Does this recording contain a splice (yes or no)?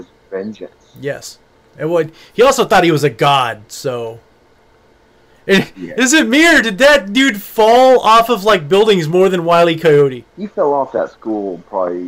no